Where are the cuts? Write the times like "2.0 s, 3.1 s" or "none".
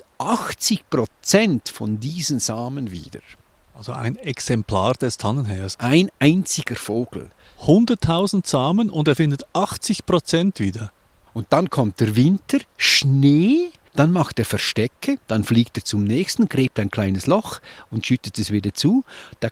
11.3 s, 13.9 s, 15.2 s